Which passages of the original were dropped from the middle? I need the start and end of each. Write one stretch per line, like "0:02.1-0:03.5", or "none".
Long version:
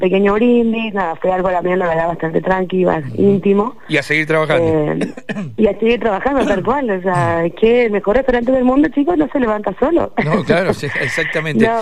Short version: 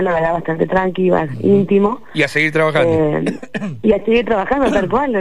none